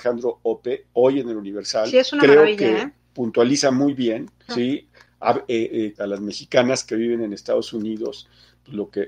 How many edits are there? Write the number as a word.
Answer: two